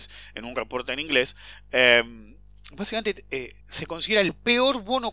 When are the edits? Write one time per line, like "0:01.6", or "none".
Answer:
0:03.6